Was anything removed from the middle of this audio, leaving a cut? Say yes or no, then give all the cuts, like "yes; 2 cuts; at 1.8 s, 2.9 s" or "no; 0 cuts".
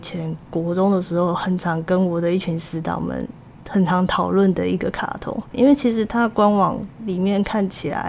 yes; 1 cut; at 5.5 s